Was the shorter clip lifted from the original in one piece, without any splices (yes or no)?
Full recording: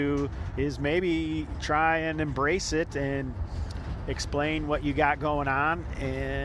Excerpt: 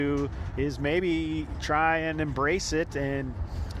yes